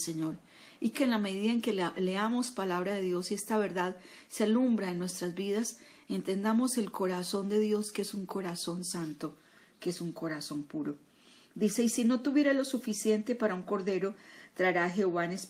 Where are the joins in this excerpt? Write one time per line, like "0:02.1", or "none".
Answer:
0:00.9